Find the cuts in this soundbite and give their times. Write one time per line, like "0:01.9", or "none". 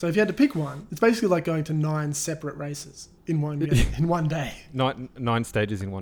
0:03.2